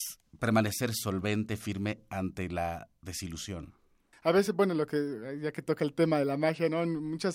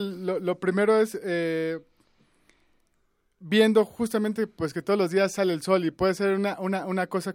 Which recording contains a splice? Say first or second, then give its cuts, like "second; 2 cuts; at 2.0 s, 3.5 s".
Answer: first; 1 cut; at 4.1 s